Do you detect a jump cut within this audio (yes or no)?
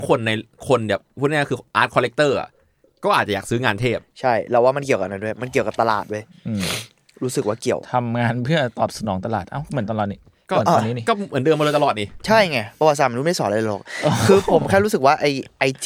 no